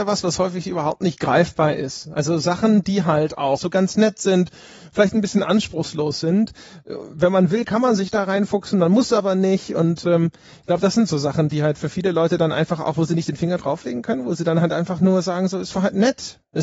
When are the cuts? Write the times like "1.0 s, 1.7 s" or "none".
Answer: 3.6 s